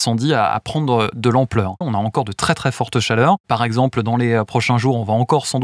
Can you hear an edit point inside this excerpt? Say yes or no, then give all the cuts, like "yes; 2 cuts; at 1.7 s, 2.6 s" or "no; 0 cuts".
yes; 1 cut; at 1.8 s